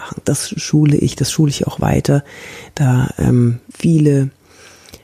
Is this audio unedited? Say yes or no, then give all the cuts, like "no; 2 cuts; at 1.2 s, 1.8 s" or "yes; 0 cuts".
no; 1 cut; at 3.7 s